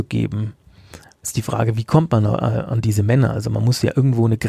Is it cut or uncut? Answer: uncut